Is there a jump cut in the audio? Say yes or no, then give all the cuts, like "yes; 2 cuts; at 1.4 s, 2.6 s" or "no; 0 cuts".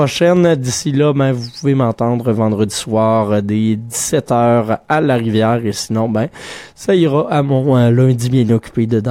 no; 0 cuts